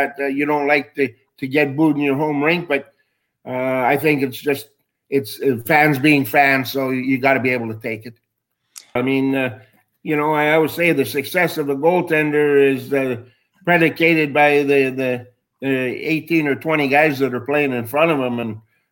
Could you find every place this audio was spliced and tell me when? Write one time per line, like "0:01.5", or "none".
0:09.0

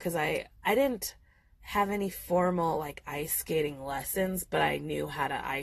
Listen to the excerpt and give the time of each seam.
none

